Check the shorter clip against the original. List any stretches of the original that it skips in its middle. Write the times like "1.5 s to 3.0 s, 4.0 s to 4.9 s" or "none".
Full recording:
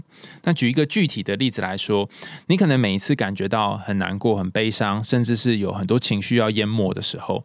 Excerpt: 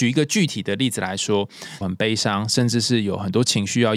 2.4 s to 4.4 s